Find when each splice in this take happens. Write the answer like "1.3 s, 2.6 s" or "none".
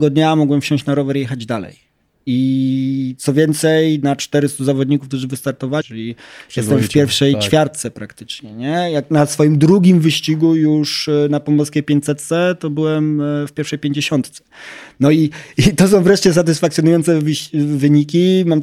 5.8 s